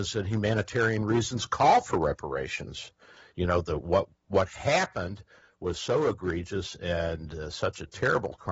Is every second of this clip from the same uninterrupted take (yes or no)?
yes